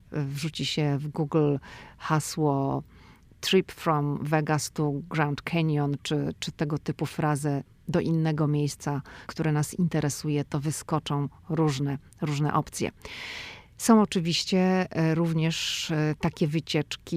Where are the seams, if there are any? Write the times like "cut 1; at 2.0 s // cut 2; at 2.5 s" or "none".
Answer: cut 1; at 9.3 s